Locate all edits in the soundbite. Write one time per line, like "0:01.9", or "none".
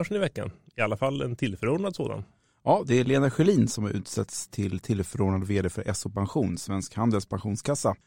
none

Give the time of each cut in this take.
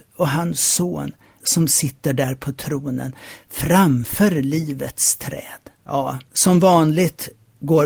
0:01.4
0:05.8

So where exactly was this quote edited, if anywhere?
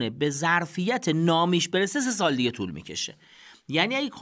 none

